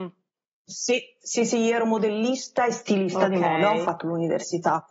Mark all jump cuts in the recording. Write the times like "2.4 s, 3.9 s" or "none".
none